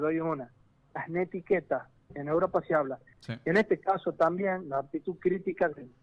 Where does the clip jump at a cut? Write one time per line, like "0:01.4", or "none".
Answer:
0:03.1

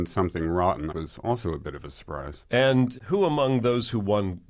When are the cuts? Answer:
0:00.9

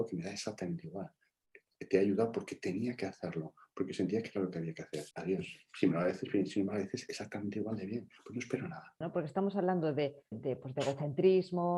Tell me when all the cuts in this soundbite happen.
0:05.1
0:09.0
0:10.3

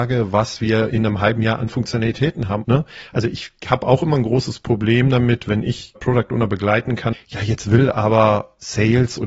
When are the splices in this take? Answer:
0:02.6
0:06.0
0:07.1

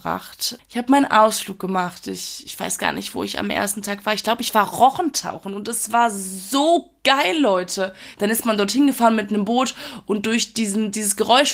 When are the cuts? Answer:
0:08.1

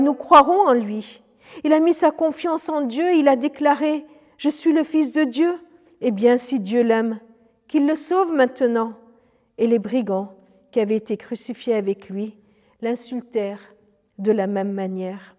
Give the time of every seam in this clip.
none

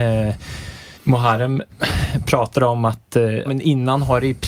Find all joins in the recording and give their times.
0:00.9
0:03.5

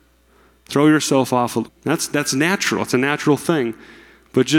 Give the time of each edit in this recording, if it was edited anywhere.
0:01.6

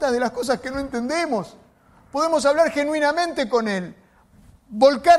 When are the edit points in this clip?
none

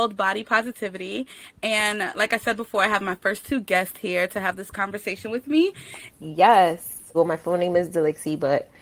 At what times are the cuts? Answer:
0:06.1
0:07.1

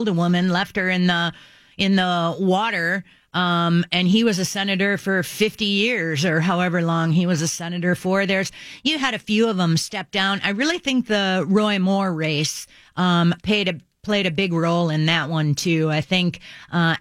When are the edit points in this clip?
none

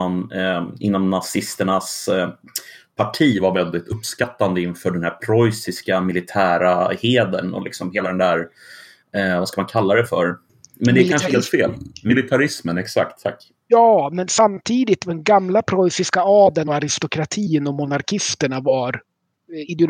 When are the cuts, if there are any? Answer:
none

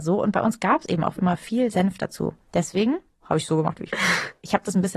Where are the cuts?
0:01.2
0:03.1

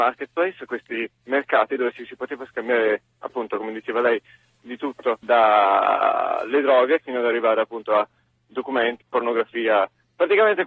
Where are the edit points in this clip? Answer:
0:05.2
0:07.0
0:09.0

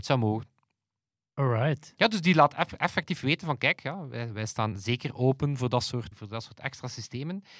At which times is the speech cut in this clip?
0:06.1

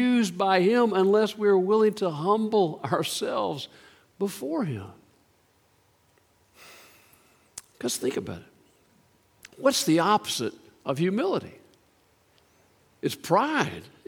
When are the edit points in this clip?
none

